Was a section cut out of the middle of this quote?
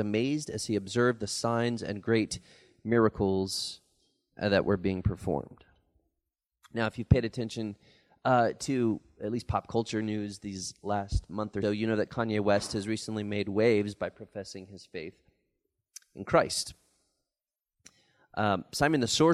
yes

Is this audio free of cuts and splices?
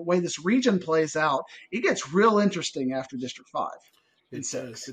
yes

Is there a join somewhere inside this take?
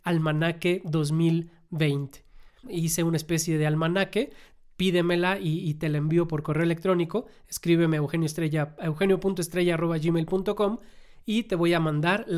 yes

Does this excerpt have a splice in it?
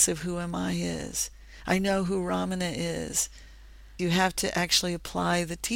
yes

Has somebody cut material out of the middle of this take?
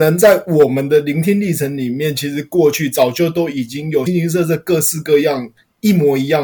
yes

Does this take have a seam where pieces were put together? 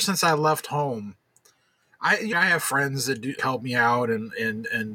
yes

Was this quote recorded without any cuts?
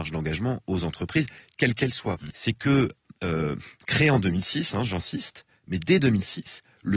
no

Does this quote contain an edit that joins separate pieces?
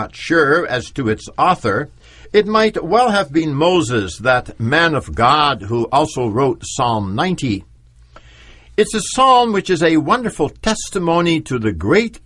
no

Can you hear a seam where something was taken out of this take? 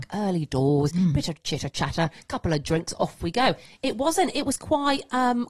no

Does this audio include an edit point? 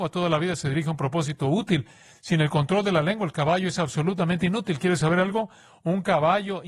no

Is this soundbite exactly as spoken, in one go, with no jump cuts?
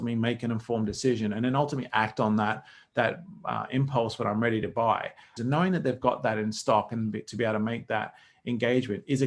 no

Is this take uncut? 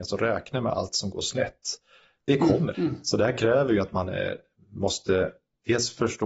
no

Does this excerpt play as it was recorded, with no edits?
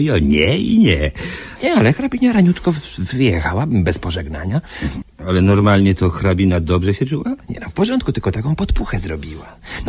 no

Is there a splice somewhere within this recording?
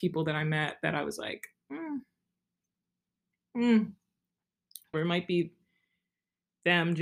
yes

